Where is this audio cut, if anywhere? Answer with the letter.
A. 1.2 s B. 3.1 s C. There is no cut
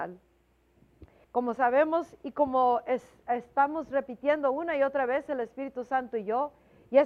A